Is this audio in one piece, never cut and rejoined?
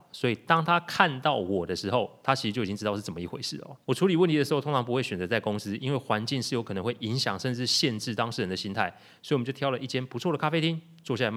no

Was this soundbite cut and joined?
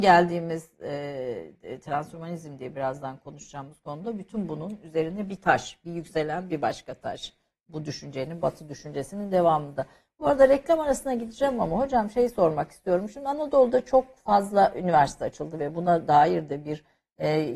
no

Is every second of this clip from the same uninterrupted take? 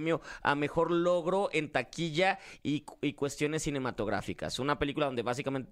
yes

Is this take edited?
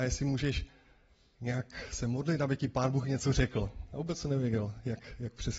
no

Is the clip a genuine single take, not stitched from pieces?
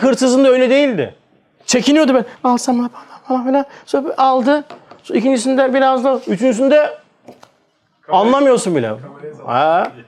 yes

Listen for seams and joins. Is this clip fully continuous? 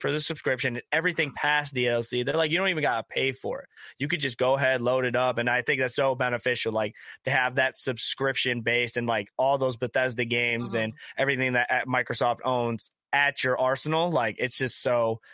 no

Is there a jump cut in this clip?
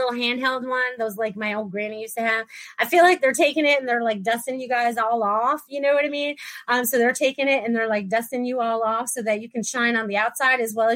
no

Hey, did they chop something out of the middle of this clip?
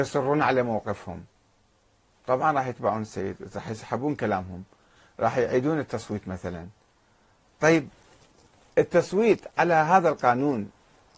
no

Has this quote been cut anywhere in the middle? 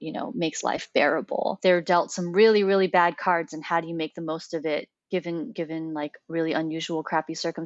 no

